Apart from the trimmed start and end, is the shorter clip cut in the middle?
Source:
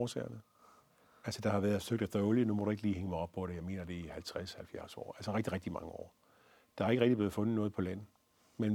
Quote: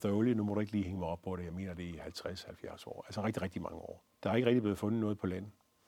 yes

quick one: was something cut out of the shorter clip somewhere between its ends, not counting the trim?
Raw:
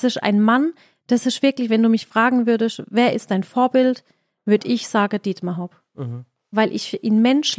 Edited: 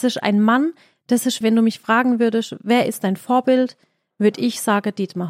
yes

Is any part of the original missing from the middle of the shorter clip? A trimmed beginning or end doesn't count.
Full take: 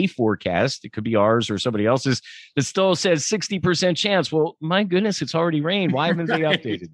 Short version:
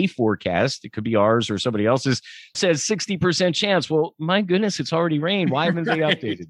yes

